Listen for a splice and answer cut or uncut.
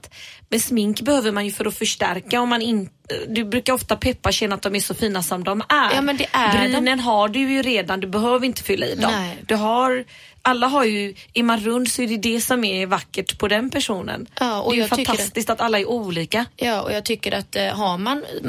uncut